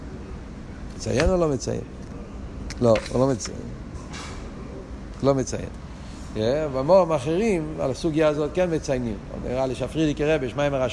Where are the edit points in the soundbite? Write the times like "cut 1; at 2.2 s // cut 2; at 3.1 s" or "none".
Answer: none